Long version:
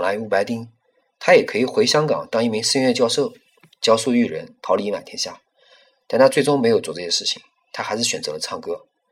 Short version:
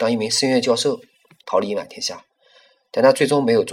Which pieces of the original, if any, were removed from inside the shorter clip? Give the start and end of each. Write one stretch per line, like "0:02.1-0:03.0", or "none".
0:03.8-0:04.6